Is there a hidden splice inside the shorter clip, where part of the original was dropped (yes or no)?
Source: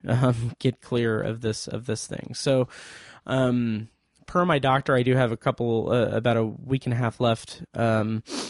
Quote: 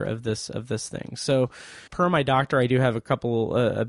yes